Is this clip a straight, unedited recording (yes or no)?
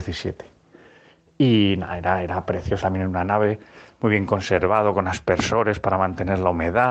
no